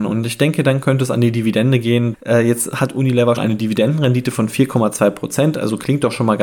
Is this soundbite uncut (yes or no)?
no